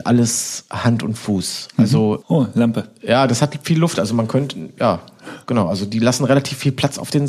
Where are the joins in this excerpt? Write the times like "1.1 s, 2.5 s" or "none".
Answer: 2.2 s